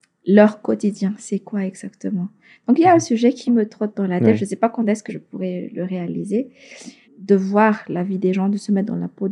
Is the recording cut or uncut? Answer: cut